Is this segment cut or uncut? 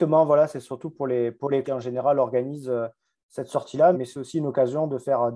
cut